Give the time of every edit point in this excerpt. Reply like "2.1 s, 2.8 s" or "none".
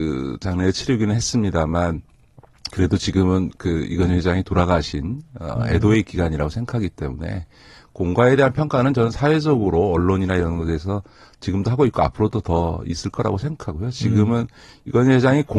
none